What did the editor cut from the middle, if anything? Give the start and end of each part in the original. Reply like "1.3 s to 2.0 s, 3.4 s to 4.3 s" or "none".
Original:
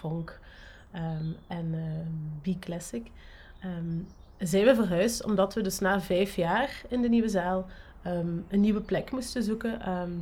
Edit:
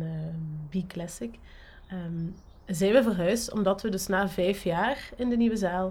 none